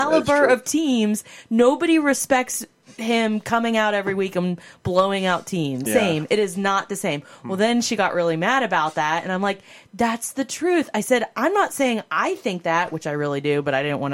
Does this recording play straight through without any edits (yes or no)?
no